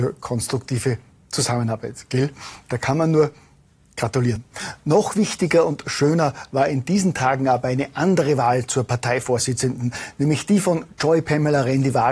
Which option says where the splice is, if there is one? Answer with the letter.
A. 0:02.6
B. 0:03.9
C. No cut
C